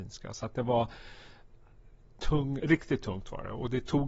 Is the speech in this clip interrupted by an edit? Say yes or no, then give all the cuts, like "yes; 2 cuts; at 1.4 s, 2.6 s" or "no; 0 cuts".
yes; 1 cut; at 2.6 s